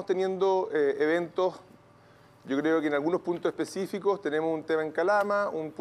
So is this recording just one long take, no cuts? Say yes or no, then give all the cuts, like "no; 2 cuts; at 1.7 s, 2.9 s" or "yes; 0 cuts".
yes; 0 cuts